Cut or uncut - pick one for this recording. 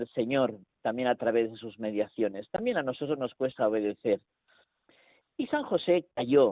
uncut